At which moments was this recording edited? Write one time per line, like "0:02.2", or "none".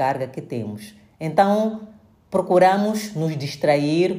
none